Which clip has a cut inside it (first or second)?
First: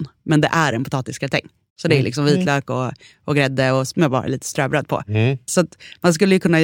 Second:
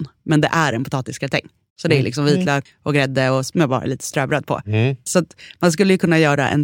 second